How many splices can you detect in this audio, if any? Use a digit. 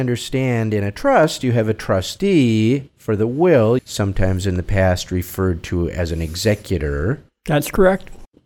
1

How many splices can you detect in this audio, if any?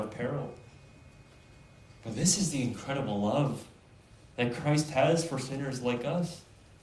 0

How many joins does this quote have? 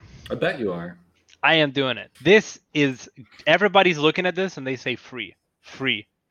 1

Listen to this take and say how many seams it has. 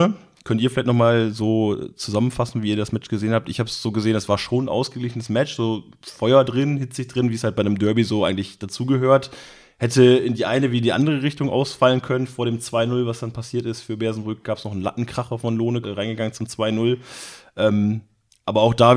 1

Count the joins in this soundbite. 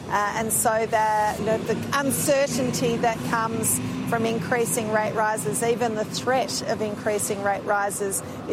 1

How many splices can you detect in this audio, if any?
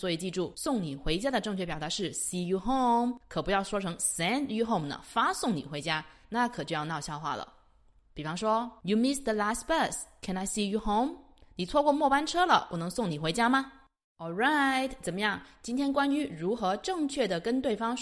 0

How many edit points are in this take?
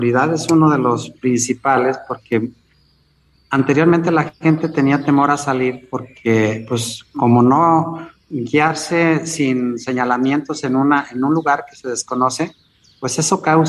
0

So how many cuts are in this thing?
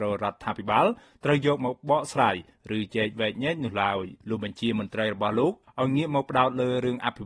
2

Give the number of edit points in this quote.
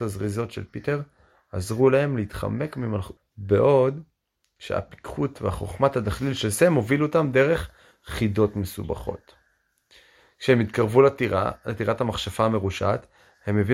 1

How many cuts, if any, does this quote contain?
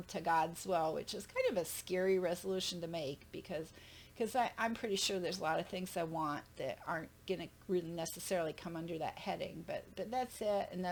0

